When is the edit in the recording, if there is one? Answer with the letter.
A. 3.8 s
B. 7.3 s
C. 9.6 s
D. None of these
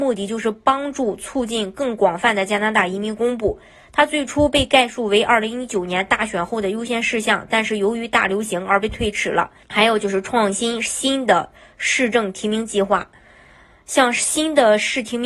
C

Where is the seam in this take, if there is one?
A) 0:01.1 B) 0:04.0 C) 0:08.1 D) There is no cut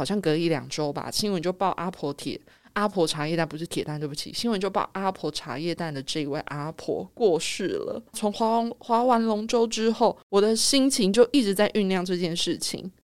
C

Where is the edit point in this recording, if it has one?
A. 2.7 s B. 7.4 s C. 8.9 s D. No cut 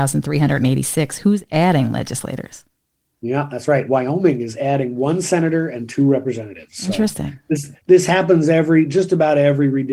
D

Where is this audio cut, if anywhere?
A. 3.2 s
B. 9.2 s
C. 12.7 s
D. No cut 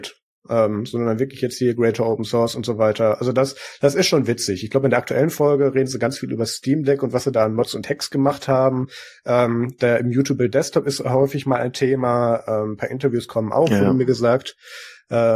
D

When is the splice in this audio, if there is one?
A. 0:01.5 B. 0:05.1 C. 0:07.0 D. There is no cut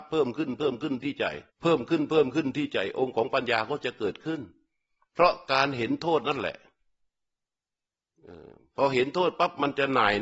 A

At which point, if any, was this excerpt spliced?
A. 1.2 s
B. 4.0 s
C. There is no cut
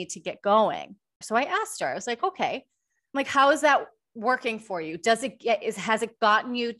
A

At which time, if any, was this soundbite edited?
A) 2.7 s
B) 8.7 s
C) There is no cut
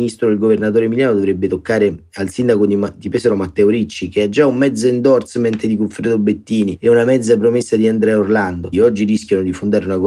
B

